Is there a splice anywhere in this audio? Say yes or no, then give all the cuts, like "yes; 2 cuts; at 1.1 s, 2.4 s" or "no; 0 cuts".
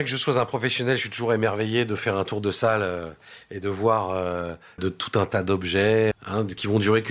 yes; 2 cuts; at 4.8 s, 6.1 s